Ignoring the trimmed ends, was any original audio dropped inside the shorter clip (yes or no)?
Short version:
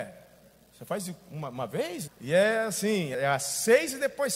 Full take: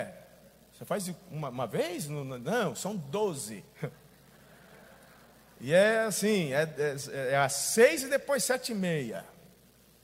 yes